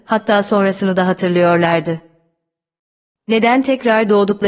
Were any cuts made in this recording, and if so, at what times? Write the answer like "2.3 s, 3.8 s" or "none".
3.1 s